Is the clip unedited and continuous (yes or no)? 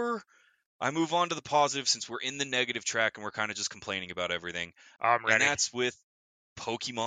no